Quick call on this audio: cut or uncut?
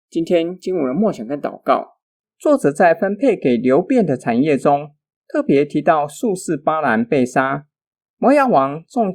uncut